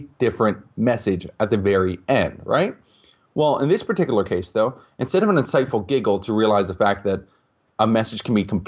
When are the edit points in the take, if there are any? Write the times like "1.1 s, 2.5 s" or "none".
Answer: none